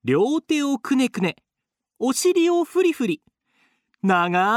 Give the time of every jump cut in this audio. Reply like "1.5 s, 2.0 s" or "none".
none